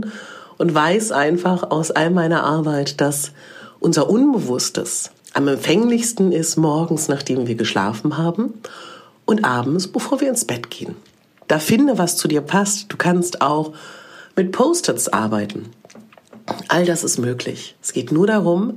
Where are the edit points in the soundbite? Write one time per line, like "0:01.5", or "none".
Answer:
0:05.2
0:11.5